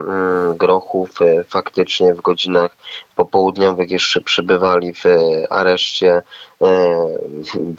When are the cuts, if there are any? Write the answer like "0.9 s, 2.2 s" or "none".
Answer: none